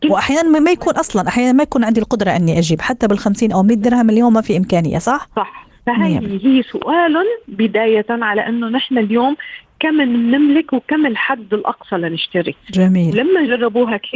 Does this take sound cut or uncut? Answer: uncut